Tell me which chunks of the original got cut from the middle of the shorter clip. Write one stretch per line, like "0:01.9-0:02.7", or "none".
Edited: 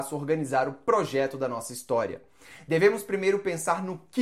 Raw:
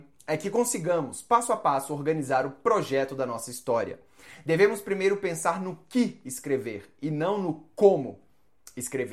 none